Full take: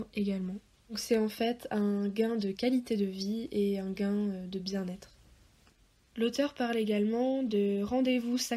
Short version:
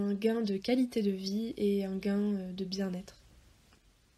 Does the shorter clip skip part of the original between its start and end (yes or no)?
no